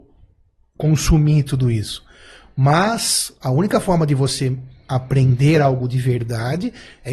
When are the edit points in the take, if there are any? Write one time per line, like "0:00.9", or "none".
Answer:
none

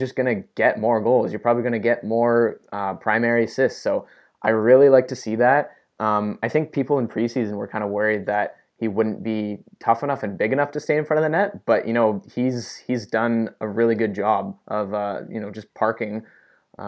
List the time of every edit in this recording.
none

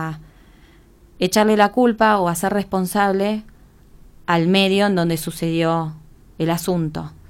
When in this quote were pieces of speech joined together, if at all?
0:06.2

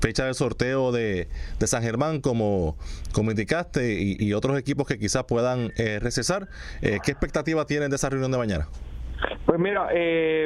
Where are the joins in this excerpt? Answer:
none

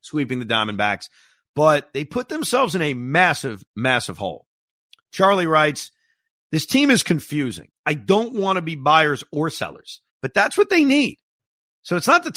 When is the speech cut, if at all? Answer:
0:10.1

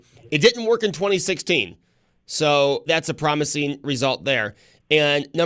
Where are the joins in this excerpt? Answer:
0:02.9

